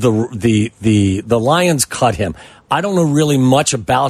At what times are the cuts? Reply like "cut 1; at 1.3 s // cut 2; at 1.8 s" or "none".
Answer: none